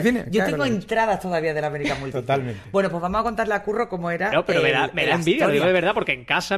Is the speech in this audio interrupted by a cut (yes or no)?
no